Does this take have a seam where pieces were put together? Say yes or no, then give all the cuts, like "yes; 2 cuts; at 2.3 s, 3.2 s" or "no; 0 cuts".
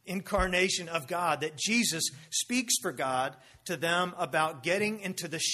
no; 0 cuts